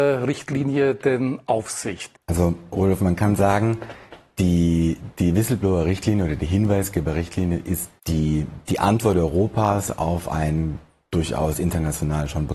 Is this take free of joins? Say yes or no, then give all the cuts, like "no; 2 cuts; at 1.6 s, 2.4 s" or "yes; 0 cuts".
no; 2 cuts; at 2.1 s, 8.0 s